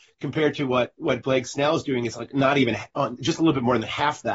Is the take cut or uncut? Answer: uncut